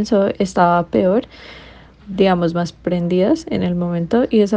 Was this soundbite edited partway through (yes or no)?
yes